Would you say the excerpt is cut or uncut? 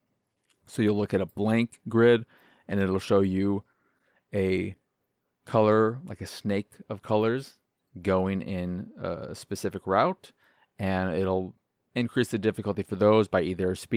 uncut